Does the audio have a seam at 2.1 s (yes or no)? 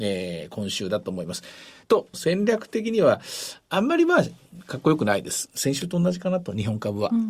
yes